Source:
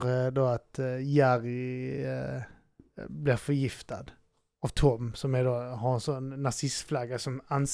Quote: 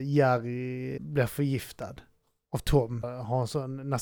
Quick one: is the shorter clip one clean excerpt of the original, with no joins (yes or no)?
no